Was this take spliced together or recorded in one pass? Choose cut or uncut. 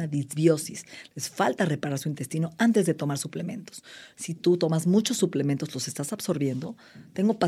cut